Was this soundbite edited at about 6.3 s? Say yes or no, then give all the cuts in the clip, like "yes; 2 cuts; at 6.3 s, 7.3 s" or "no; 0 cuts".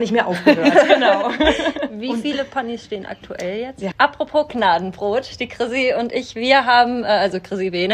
no; 1 cut; at 3.9 s